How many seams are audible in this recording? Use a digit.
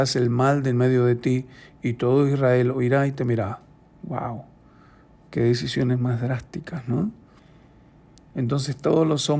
1